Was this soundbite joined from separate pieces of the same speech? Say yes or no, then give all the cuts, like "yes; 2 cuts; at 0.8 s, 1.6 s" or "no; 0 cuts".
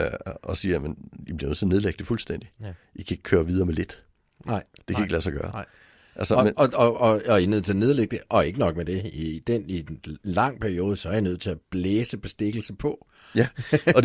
no; 0 cuts